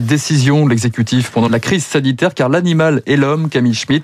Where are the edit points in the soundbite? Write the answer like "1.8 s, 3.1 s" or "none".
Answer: 1.5 s